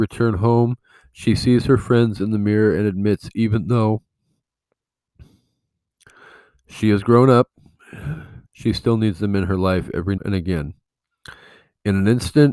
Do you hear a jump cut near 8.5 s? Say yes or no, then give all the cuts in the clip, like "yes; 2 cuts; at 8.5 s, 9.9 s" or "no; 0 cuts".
yes; 2 cuts; at 8.5 s, 10.2 s